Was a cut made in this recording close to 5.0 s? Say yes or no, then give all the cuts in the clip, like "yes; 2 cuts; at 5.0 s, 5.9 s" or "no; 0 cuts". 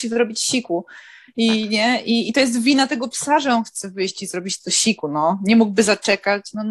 no; 0 cuts